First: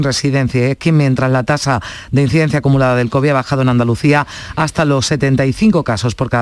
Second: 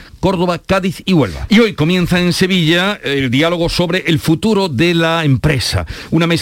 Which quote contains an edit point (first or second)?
second